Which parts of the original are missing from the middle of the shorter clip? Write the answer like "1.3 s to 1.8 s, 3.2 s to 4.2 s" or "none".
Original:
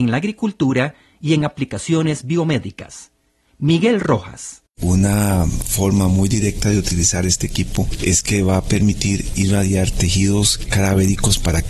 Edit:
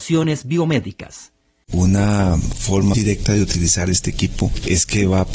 3.4 s to 4.7 s, 6.0 s to 6.3 s